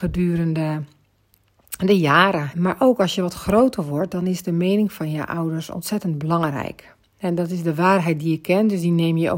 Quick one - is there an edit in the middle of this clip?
yes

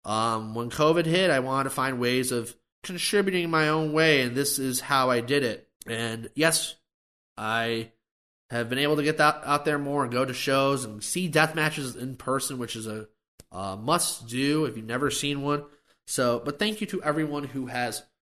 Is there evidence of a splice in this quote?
no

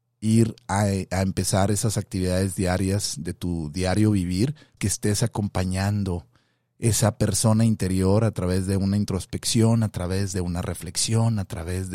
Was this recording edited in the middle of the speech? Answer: yes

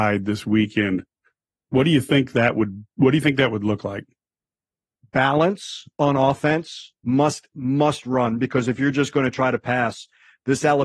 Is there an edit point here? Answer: no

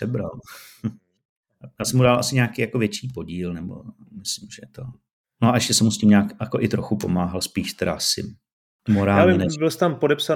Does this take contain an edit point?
no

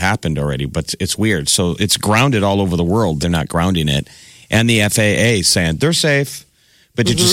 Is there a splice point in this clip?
yes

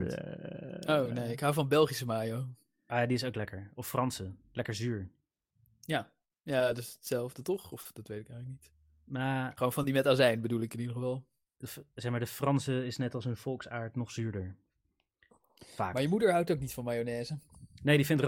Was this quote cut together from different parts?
no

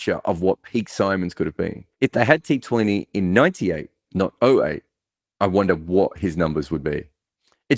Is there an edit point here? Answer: yes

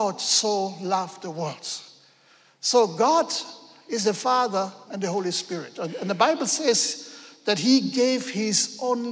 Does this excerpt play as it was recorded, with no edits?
no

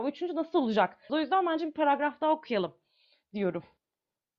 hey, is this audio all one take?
no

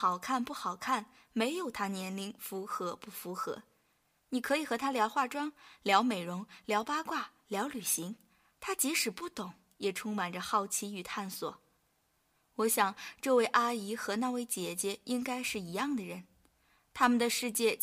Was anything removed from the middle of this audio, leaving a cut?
no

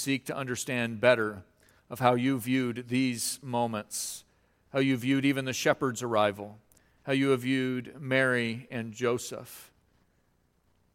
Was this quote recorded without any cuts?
yes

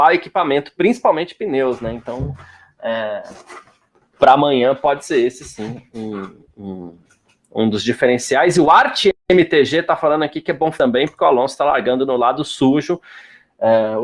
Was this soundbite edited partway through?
yes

